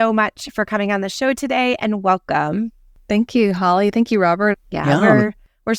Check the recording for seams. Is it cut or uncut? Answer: cut